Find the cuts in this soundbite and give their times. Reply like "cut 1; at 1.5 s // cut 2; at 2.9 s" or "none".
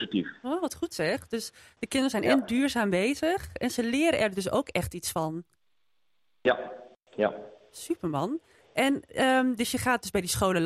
none